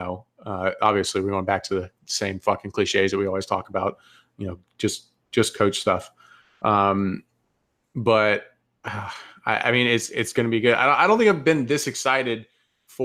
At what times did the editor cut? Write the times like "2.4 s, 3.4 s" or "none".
none